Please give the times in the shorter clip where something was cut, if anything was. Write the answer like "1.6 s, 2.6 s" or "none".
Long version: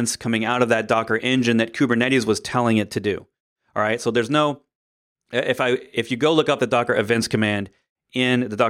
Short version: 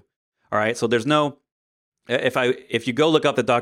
none